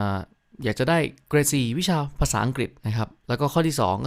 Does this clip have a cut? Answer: yes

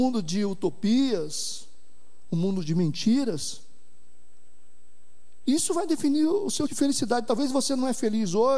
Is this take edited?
yes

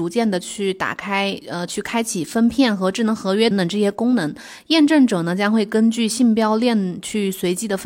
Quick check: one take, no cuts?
no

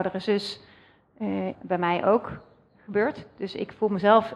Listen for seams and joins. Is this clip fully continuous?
no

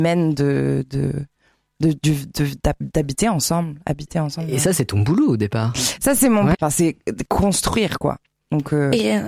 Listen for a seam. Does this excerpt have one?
yes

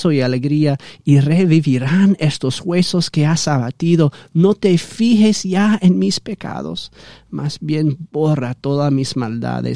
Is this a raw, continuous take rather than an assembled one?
yes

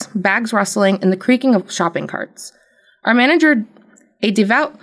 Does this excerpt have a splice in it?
no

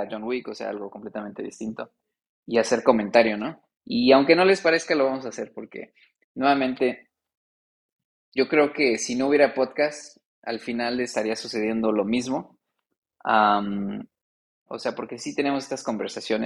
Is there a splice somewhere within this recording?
yes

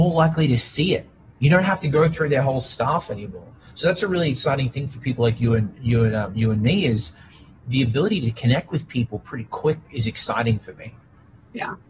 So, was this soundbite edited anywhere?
no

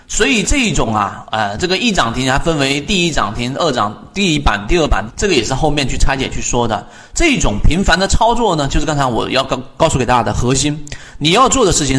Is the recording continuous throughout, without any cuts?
no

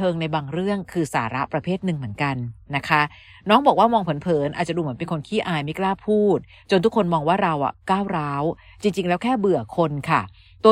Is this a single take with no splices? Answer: yes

